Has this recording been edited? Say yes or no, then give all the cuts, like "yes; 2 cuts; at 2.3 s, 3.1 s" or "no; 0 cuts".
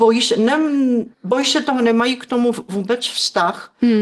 yes; 1 cut; at 1.1 s